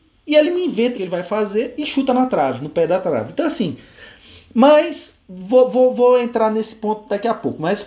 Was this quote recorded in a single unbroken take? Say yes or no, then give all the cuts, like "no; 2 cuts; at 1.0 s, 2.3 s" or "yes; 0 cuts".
no; 1 cut; at 0.9 s